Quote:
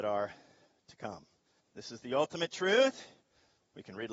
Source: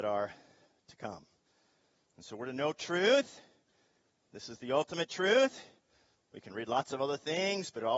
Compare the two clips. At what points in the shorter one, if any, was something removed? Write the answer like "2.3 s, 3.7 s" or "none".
1.6 s